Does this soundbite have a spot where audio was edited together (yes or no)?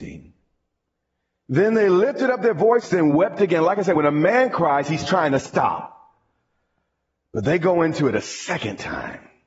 no